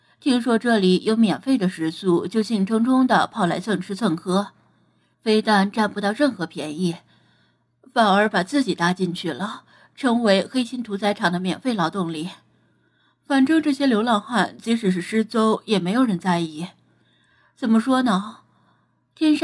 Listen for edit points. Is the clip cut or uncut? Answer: cut